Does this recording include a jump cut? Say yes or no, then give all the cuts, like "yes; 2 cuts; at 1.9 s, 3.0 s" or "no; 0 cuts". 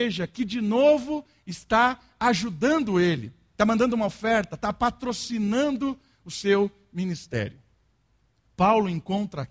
no; 0 cuts